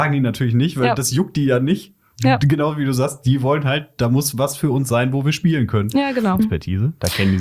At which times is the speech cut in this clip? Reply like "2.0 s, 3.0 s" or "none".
6.4 s